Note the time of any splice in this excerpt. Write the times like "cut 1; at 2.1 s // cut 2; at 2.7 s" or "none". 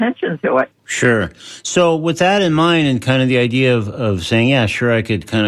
none